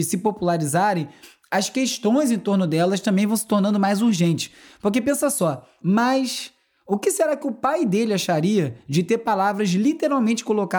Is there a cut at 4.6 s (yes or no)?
no